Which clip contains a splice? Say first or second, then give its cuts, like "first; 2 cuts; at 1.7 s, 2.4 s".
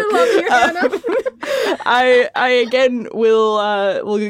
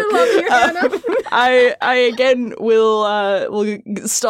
second; 1 cut; at 1.2 s